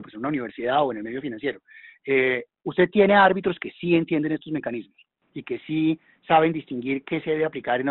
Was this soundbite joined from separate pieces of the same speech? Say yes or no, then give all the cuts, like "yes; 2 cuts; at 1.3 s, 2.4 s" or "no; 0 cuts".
no; 0 cuts